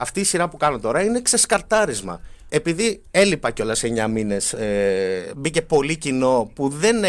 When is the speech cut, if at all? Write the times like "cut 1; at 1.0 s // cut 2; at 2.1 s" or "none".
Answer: cut 1; at 2.5 s // cut 2; at 5.3 s